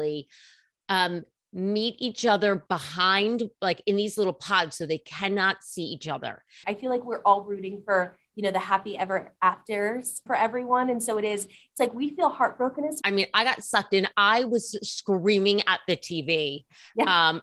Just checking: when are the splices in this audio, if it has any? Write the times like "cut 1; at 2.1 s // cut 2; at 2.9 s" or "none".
cut 1; at 6.6 s // cut 2; at 10.3 s // cut 3; at 13.0 s